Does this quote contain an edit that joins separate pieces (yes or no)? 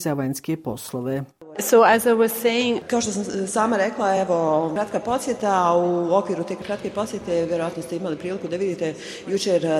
no